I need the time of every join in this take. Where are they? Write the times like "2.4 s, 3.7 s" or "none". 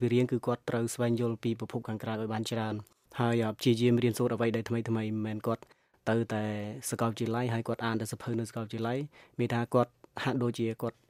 none